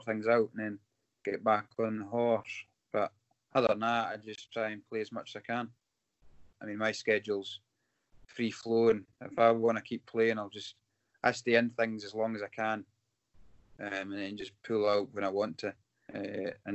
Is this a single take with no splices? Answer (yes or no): no